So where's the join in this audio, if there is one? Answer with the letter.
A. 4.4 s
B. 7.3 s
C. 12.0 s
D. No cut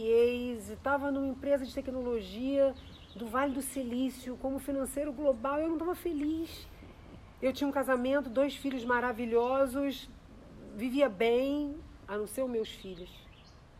C